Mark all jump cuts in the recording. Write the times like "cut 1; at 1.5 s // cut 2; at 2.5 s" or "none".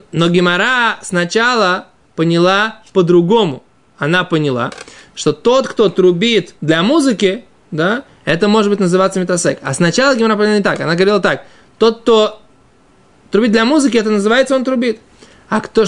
cut 1; at 6.6 s